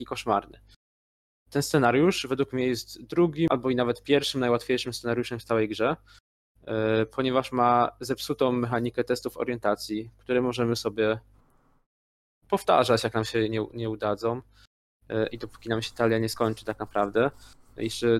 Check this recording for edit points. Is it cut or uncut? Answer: uncut